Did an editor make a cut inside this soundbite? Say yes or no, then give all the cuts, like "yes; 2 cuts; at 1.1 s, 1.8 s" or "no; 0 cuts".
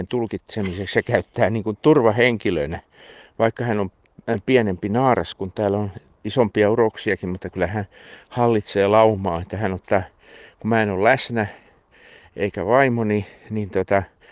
no; 0 cuts